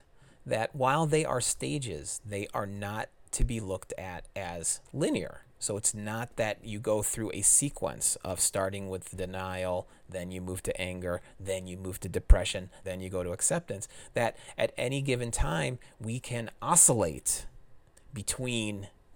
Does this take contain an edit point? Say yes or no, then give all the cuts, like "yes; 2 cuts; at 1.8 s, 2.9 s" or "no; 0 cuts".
yes; 1 cut; at 12.8 s